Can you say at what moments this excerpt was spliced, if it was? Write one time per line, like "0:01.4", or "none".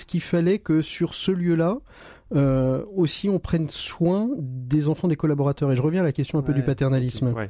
none

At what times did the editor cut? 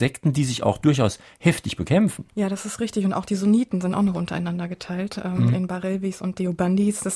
0:02.3

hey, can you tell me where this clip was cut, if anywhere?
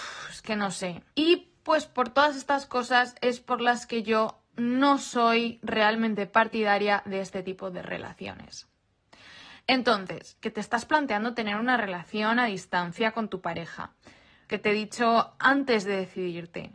0:01.1
0:10.4
0:14.5

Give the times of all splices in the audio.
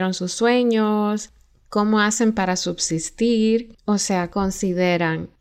0:04.3

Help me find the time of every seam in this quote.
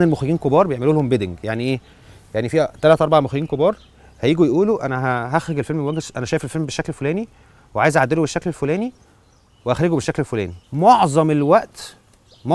0:10.6

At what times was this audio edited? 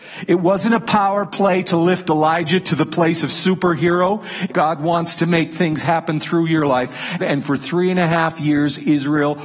0:04.5
0:07.2

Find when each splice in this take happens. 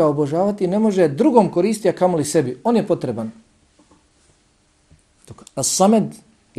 0:05.5

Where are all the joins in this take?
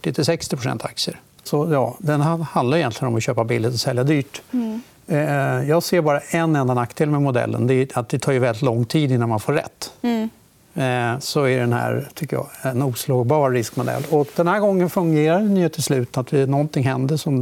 0:01.5
0:11.2

